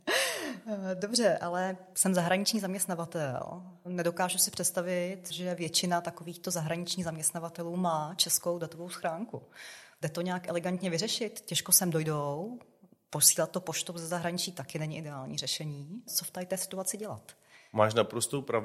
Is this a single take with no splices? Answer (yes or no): yes